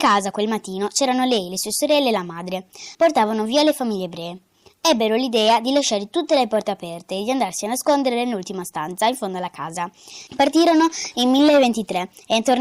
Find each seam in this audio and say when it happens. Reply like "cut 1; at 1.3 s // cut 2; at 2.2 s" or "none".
cut 1; at 2.9 s // cut 2; at 10.3 s